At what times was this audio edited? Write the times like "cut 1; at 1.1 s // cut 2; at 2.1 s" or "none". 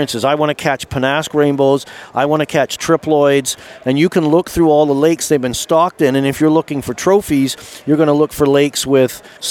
none